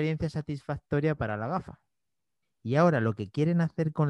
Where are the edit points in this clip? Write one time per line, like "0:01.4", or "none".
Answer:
0:02.4